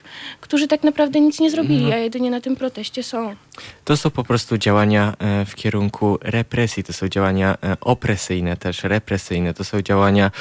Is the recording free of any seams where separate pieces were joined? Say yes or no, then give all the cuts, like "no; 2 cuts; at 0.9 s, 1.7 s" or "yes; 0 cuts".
yes; 0 cuts